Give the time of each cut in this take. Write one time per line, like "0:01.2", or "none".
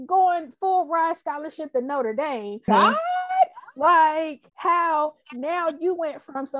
0:02.7
0:04.5